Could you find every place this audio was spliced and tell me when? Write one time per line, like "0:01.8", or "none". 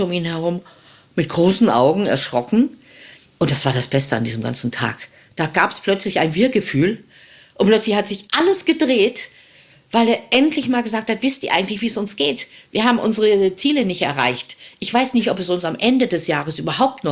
0:03.3